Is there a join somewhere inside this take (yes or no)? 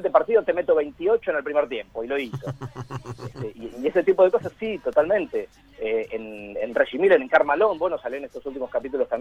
no